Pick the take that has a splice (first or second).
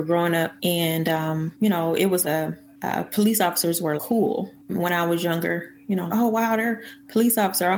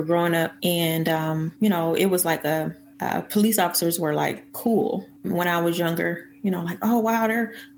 first